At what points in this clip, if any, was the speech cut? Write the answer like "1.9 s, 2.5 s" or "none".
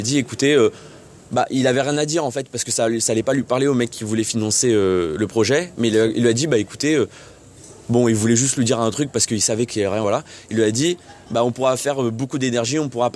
none